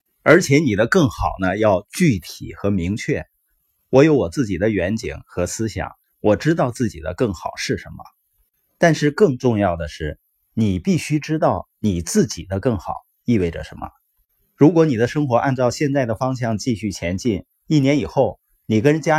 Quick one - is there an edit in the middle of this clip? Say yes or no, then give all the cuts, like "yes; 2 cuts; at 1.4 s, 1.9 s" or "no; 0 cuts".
no; 0 cuts